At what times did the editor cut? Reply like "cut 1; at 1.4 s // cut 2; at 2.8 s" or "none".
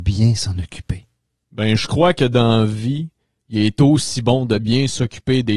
none